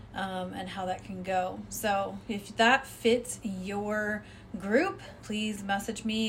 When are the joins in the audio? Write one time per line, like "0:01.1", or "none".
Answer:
0:05.2